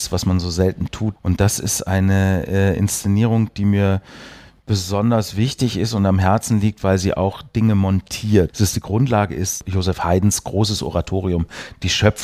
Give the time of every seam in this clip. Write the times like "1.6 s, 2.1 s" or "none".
1.2 s, 8.5 s